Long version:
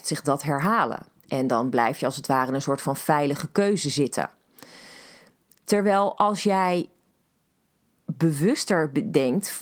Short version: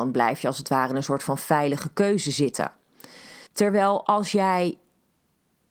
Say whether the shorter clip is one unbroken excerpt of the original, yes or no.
no